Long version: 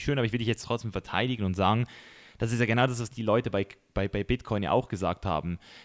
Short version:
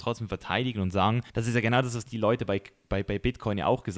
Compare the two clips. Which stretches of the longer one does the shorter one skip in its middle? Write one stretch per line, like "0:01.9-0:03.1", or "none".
0:01.9-0:02.3